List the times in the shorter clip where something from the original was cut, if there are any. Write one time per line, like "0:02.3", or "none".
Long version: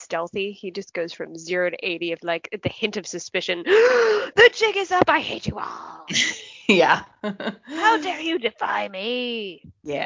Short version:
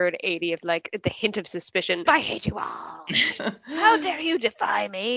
0:02.0
0:03.4

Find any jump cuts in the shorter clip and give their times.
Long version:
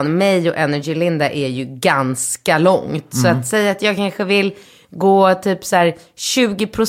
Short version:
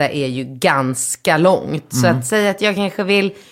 none

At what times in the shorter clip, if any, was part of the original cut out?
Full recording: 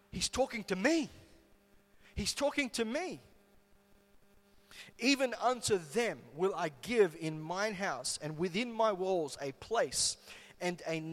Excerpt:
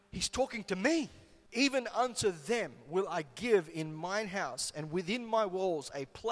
0:01.4

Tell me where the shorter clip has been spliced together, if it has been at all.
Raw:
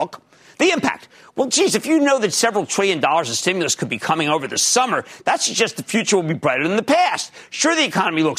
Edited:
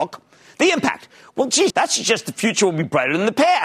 0:01.7

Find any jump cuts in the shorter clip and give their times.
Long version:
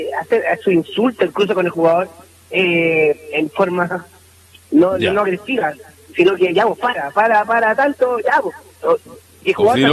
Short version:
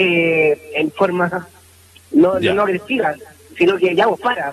none

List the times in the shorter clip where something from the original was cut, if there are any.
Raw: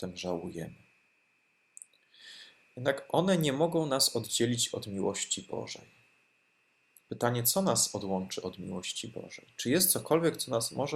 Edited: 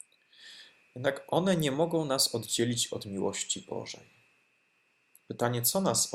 none

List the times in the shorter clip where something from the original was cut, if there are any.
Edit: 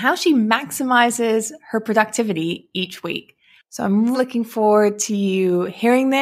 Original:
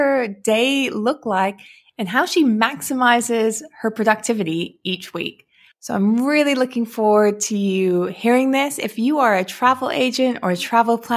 0:04.1

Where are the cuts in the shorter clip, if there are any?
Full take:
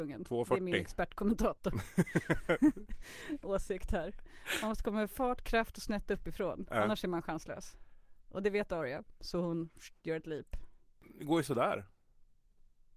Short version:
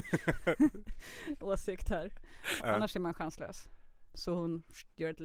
0:02.6
0:04.1

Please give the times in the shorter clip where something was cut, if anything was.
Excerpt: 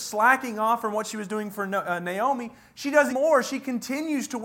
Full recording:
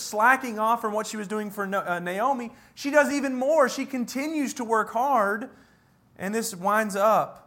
0:03.1

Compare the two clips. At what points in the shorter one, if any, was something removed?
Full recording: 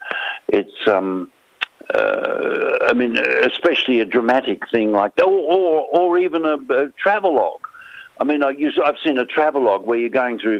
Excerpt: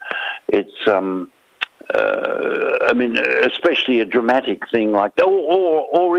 none

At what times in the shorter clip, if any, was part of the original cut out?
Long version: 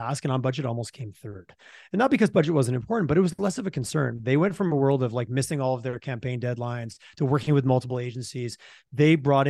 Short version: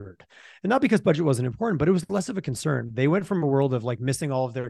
none

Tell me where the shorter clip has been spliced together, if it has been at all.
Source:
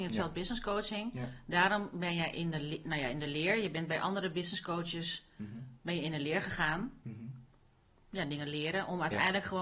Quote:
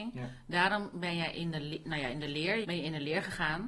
0:02.6

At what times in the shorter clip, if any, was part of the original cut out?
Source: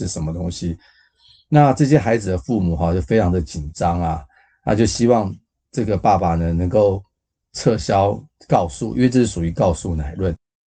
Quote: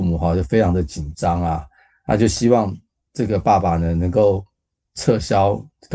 none

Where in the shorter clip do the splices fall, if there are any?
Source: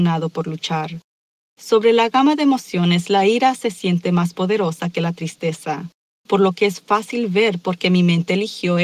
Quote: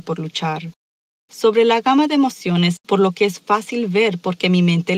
0:02.8

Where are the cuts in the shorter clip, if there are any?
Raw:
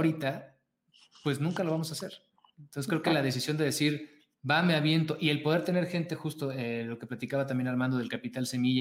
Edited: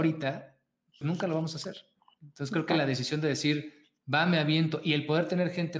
0:01.0

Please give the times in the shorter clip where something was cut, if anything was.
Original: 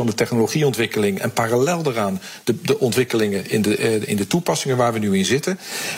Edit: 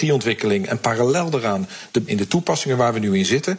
0:02.1

